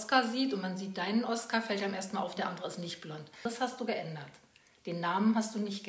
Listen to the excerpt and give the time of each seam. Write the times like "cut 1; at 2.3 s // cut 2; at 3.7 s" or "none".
cut 1; at 2.4 s